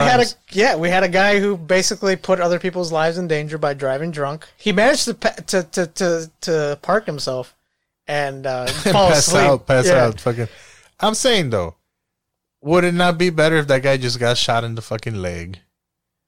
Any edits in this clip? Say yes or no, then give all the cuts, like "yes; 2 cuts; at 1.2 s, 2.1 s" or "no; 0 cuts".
no; 0 cuts